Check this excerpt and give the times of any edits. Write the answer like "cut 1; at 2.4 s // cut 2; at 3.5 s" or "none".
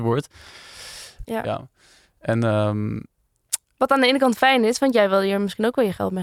cut 1; at 1.2 s